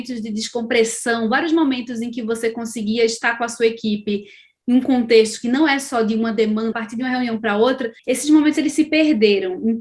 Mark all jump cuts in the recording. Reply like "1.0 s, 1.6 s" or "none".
6.7 s, 8.0 s